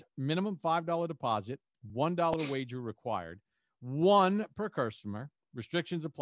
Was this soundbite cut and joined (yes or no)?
no